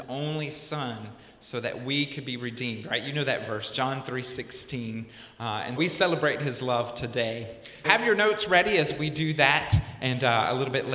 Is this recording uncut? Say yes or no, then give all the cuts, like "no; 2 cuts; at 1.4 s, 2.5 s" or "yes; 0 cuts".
no; 2 cuts; at 5.8 s, 7.8 s